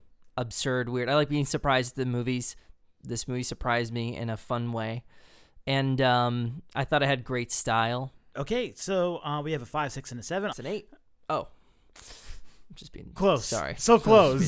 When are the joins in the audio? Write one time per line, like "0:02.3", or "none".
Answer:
0:08.3
0:10.5
0:13.2